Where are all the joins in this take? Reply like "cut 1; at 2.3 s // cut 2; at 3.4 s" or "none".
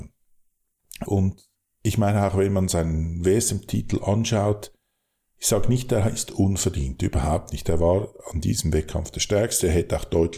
cut 1; at 1.1 s